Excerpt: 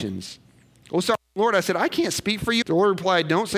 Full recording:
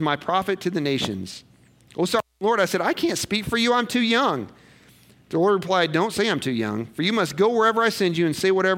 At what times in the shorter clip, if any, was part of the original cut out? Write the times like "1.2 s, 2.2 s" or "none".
2.6 s